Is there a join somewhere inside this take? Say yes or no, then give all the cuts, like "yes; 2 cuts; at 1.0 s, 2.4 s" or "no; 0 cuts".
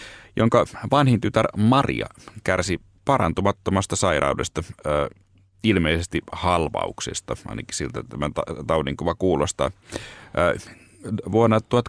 no; 0 cuts